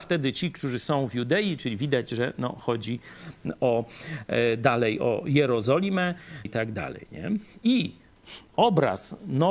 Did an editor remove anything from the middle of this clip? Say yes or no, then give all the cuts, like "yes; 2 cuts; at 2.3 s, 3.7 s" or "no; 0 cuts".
yes; 1 cut; at 6.5 s